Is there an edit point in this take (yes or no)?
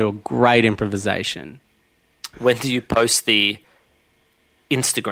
yes